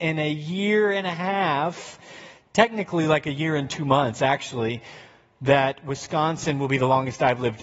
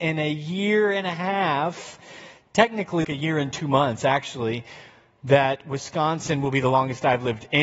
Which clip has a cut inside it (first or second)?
second